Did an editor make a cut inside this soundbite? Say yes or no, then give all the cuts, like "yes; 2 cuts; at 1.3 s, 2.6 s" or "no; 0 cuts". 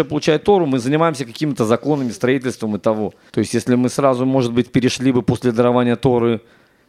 yes; 1 cut; at 3.3 s